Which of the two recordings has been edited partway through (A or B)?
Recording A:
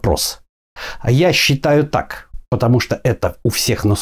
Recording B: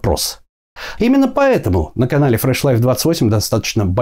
B